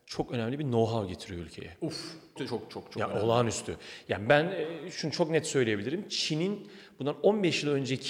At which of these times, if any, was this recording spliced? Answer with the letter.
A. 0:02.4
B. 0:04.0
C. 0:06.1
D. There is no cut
A